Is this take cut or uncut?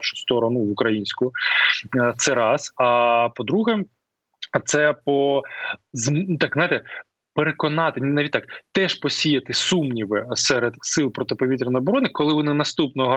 uncut